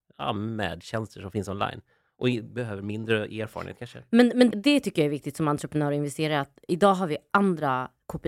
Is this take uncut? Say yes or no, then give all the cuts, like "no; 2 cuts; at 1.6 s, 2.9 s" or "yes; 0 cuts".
no; 1 cut; at 4.5 s